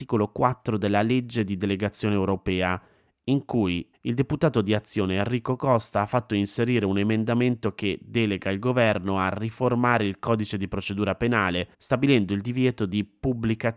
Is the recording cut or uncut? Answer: cut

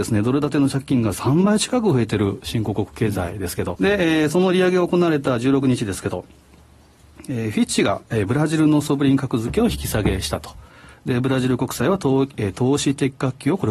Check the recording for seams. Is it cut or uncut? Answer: cut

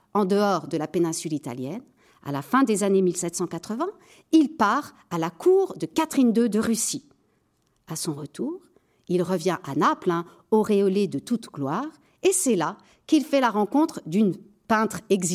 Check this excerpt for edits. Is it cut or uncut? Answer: uncut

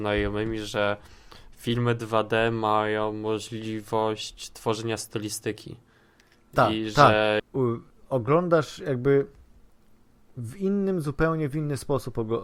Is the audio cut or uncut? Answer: cut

